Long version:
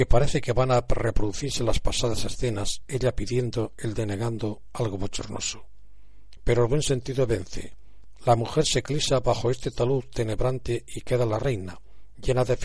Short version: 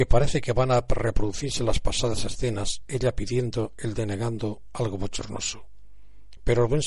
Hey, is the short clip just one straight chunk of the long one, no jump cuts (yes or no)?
yes